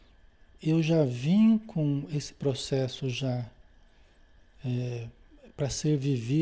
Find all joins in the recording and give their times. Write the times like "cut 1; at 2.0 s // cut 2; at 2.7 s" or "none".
none